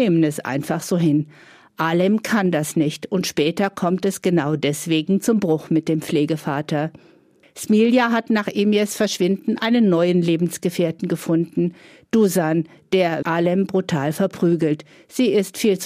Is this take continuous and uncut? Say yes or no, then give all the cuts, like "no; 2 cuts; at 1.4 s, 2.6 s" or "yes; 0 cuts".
no; 1 cut; at 13.2 s